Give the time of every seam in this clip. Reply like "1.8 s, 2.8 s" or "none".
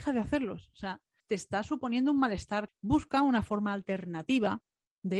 1.2 s, 2.7 s